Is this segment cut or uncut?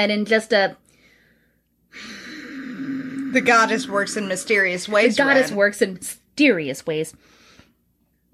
uncut